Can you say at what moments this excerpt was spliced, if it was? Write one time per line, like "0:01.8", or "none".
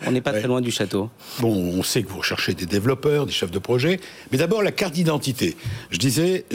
0:01.4